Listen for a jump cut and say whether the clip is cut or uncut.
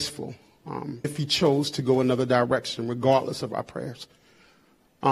cut